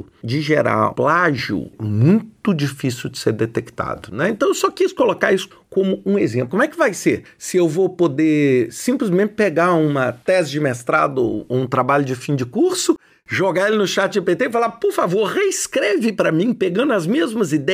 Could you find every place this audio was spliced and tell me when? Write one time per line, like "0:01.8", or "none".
0:00.9
0:06.5